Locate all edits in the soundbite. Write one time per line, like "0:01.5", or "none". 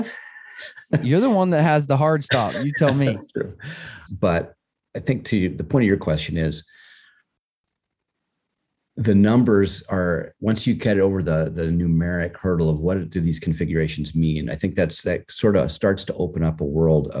0:04.1